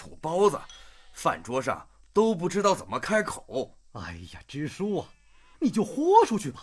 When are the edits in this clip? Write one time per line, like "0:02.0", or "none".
0:05.5